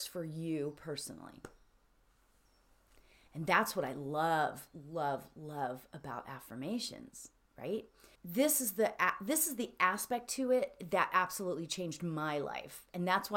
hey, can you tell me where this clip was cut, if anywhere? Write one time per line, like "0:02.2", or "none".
0:08.1